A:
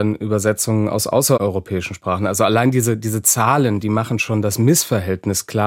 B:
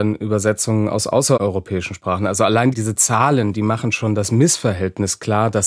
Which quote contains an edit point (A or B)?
B